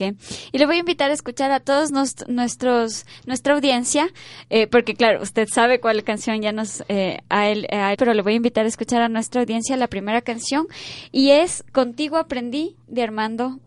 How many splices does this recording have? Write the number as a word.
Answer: one